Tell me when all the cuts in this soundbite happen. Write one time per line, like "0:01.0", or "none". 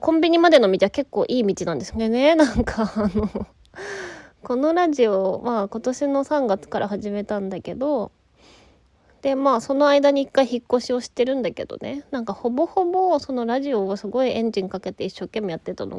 0:01.9